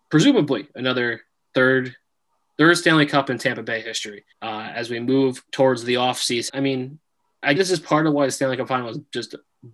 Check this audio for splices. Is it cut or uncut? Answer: cut